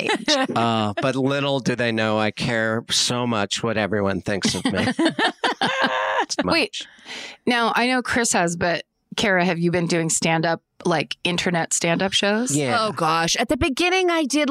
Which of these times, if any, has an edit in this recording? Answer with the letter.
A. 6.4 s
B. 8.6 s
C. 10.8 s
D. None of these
A